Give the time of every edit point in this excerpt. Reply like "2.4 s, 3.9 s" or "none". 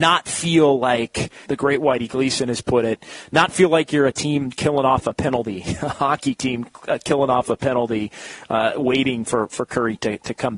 1.5 s